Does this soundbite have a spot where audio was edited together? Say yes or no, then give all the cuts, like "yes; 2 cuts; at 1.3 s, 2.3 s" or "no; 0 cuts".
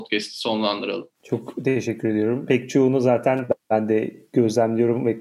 yes; 2 cuts; at 1.1 s, 2.5 s